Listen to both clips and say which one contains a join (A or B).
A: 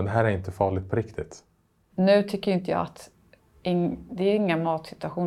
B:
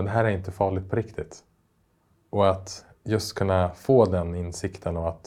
A